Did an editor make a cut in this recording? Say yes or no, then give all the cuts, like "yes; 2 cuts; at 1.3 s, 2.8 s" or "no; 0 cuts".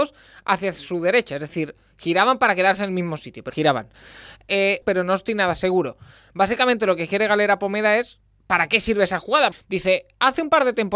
yes; 3 cuts; at 3.5 s, 4.8 s, 9.5 s